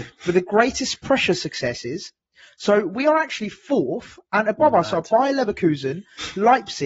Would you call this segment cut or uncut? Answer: uncut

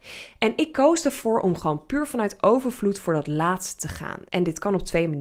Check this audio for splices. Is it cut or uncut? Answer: cut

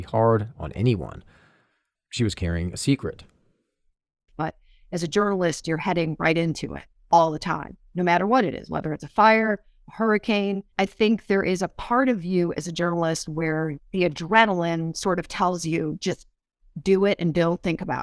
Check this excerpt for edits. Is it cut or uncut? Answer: cut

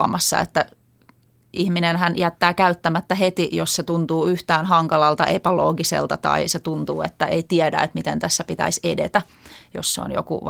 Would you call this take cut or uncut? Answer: uncut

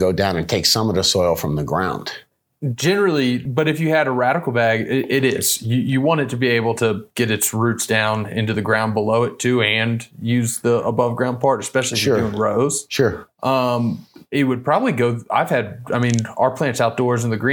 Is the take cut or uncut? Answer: cut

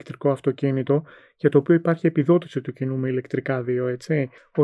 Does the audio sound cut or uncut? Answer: uncut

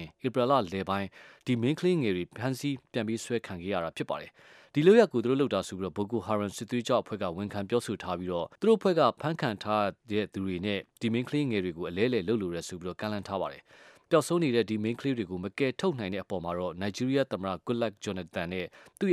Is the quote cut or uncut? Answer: cut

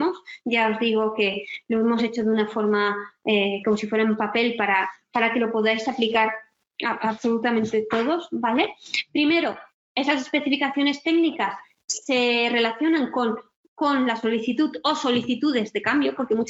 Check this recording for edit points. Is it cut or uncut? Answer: uncut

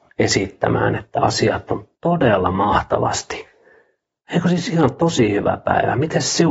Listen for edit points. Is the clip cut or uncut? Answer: uncut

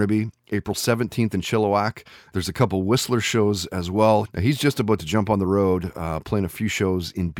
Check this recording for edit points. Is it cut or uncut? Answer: cut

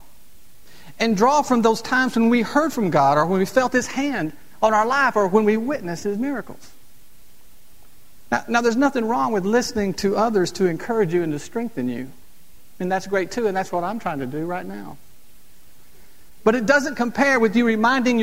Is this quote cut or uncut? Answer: uncut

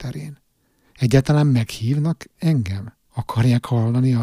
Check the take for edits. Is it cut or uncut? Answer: uncut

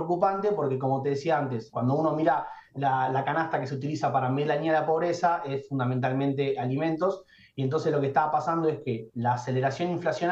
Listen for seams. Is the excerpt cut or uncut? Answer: cut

